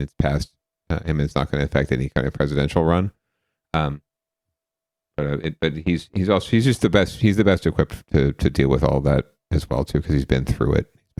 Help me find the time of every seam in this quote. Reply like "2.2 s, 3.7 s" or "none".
none